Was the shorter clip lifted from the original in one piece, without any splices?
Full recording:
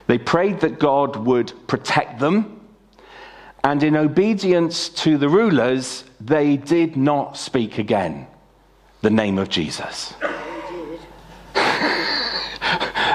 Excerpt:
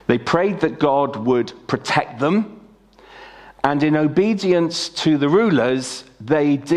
yes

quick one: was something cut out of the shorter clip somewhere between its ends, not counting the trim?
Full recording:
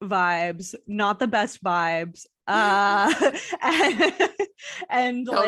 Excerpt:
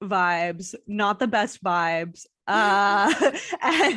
no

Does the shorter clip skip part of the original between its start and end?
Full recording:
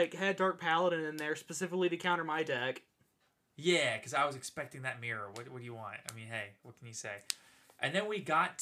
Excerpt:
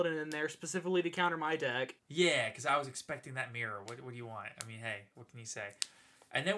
yes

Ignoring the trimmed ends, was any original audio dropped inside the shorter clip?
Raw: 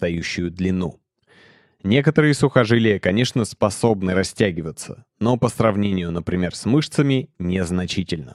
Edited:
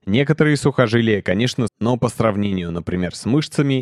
yes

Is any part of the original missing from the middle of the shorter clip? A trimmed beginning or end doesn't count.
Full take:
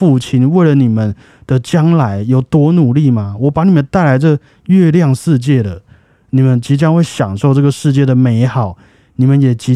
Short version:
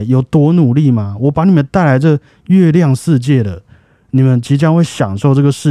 no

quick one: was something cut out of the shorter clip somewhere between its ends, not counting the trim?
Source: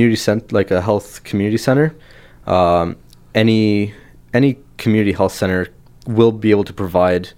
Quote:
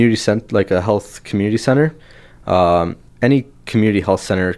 yes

